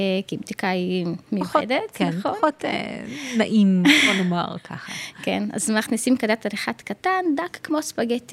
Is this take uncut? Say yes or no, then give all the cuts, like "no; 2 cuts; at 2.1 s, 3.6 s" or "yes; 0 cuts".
no; 1 cut; at 1.2 s